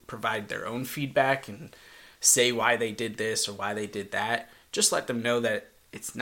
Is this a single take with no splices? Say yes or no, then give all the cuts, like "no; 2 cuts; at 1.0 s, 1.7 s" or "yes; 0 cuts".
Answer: yes; 0 cuts